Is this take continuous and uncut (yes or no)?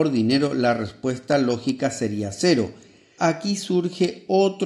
no